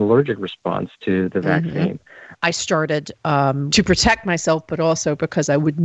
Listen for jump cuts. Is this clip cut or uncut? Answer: cut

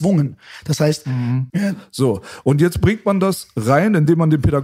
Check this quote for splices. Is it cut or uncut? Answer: cut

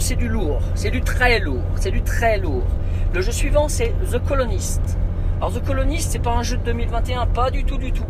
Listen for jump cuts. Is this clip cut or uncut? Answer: cut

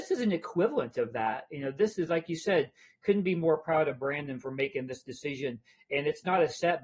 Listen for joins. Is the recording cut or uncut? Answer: uncut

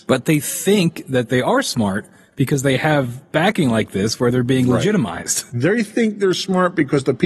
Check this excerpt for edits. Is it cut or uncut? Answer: uncut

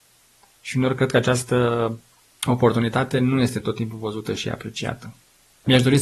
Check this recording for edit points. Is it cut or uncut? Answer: uncut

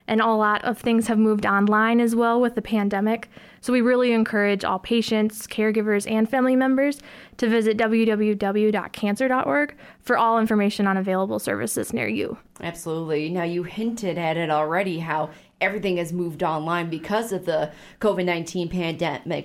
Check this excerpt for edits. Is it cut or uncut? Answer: uncut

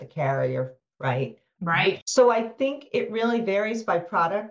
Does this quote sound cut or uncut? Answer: cut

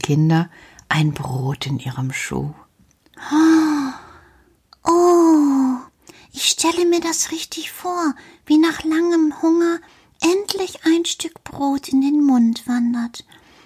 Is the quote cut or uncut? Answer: uncut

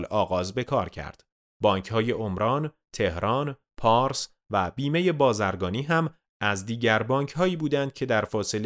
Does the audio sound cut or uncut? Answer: cut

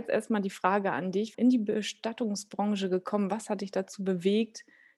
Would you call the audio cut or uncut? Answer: cut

